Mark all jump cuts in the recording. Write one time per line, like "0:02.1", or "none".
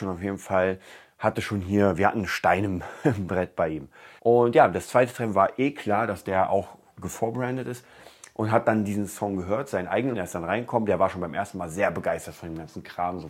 0:04.2
0:10.1